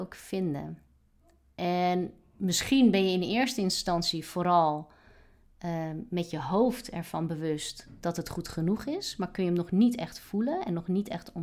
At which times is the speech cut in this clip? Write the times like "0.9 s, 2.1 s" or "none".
none